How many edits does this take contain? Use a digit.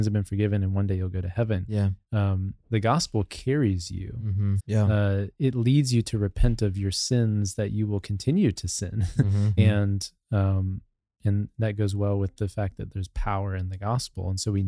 2